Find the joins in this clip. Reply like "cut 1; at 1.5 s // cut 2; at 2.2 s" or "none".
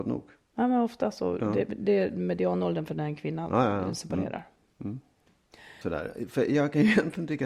cut 1; at 5.8 s